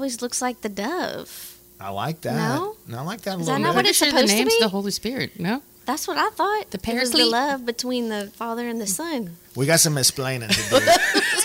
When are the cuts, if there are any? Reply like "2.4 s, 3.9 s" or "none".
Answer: 9.4 s